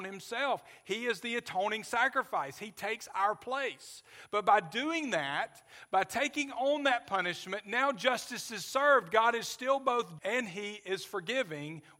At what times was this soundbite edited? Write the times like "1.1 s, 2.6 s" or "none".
10.2 s

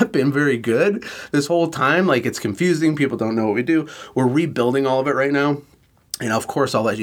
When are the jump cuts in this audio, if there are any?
none

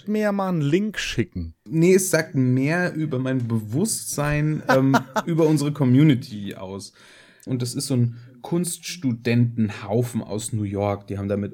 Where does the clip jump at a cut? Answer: 1.7 s, 7.5 s

